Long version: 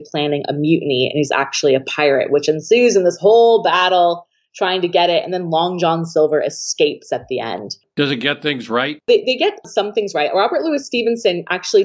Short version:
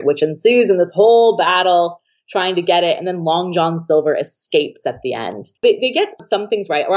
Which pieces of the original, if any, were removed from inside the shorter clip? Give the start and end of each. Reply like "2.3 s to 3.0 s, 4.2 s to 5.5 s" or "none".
7.8 s to 9.0 s